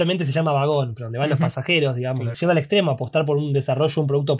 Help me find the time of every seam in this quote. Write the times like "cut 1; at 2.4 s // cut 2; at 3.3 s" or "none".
cut 1; at 2.3 s